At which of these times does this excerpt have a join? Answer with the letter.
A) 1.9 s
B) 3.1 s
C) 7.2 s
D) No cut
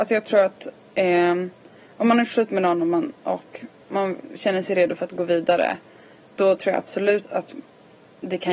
C